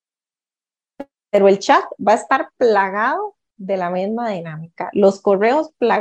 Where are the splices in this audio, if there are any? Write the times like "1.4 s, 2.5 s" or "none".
none